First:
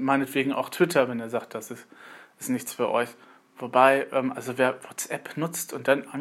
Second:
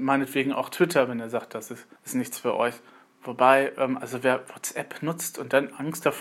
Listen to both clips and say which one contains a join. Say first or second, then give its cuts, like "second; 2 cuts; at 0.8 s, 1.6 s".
second; 1 cut; at 2.0 s